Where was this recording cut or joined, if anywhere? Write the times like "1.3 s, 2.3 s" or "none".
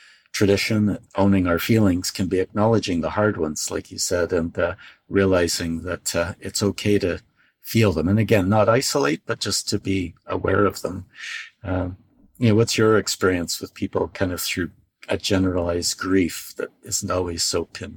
1.1 s